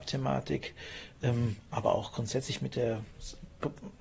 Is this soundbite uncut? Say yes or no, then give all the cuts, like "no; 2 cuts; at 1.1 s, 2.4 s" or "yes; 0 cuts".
yes; 0 cuts